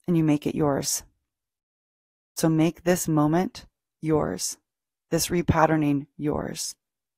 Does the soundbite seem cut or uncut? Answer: uncut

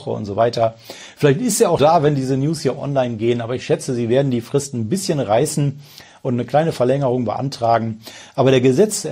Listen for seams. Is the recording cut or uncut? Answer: cut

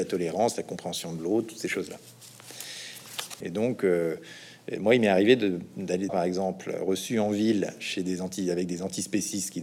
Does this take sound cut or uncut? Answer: cut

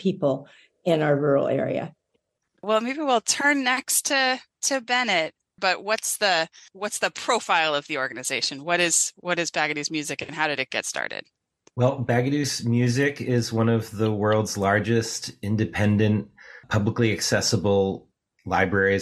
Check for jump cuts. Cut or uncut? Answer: cut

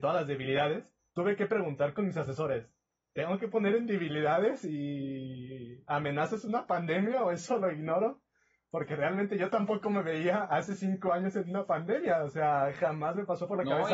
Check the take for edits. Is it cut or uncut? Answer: cut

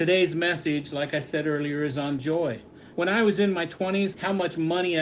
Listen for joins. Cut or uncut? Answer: cut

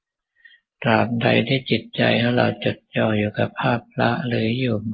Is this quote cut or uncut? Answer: uncut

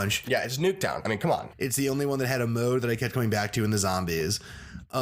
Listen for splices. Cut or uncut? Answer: cut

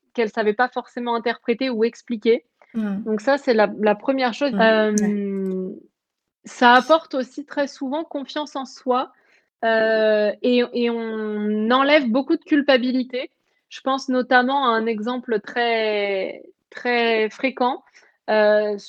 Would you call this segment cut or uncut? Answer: cut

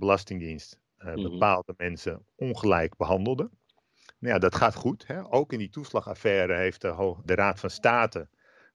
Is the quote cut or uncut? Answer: cut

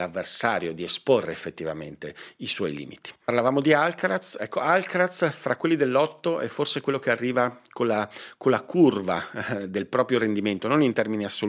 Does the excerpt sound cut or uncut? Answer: uncut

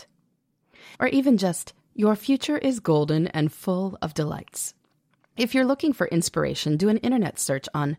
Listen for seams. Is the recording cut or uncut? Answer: cut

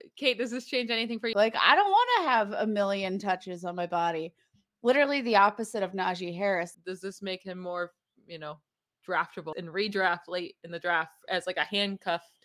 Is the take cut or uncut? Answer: cut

